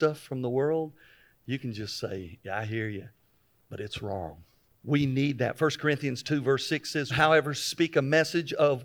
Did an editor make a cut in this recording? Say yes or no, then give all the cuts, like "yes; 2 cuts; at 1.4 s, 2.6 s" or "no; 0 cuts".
yes; 2 cuts; at 4.7 s, 7.1 s